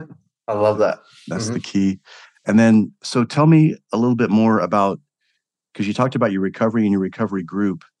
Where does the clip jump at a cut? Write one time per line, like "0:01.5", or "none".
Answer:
none

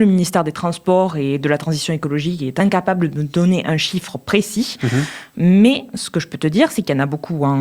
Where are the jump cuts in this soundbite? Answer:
none

